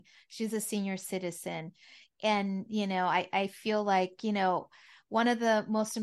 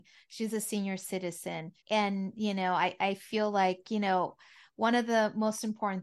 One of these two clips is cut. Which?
second; 1 cut; at 1.8 s

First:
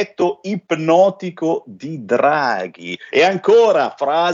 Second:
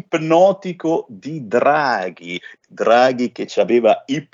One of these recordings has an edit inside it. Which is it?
first; 1 cut; at 3.1 s

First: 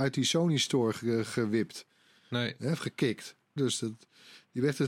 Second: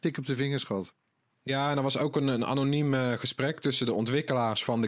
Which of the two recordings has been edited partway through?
first; 1 cut; at 3.6 s

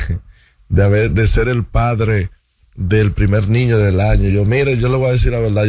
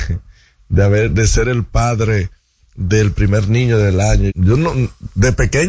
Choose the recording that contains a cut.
second; 1 cut; at 4.3 s

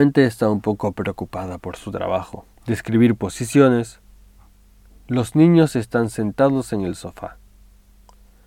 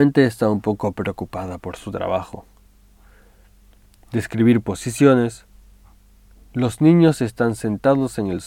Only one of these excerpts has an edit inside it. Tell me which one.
first; 1 cut; at 2.5 s

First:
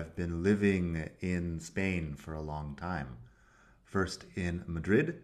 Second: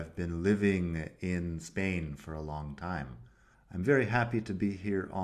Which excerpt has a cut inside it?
second; 1 cut; at 3.5 s

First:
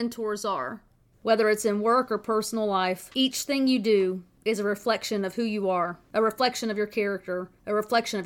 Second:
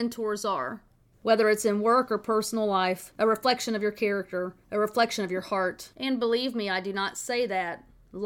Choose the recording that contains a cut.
second; 2 cuts; at 3.1 s, 5.9 s

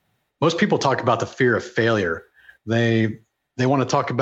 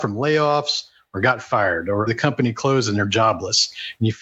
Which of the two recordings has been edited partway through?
second; 1 cut; at 2.1 s

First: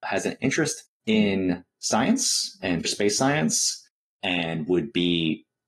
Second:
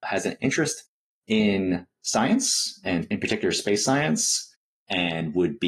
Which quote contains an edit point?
first; 2 cuts; at 0.9 s, 2.8 s

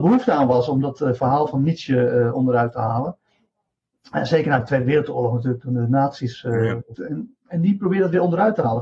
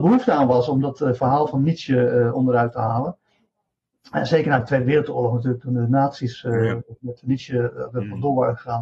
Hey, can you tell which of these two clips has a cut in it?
first; 1 cut; at 7.0 s

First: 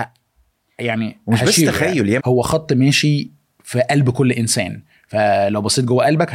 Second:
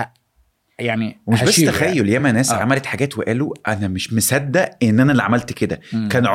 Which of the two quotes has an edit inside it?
first; 1 cut; at 2.2 s

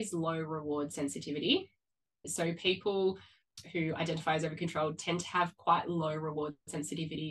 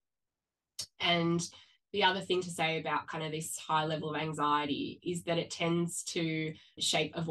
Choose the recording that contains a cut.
first; 1 cut; at 2.1 s

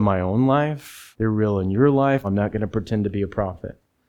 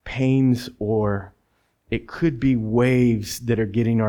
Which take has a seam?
first; 2 cuts; at 1.1 s, 2.2 s

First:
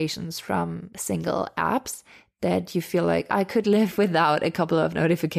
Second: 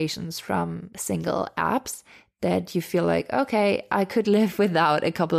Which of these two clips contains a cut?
first; 1 cut; at 3.3 s

